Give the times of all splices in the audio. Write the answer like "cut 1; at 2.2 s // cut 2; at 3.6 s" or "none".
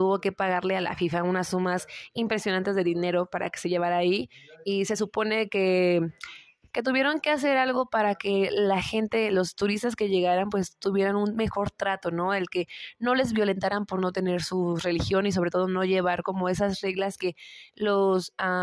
none